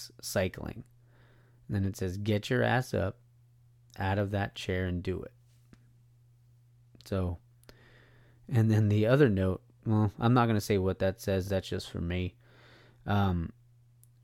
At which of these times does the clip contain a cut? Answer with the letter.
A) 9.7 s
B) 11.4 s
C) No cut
C